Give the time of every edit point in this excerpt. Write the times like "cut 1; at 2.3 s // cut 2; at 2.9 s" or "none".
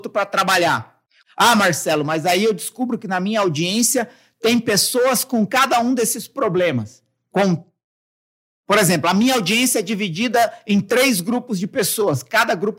cut 1; at 1.2 s